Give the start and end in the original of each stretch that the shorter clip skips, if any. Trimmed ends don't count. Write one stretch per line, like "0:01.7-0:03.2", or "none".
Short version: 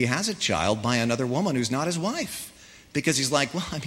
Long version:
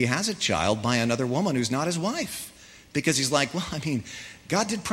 none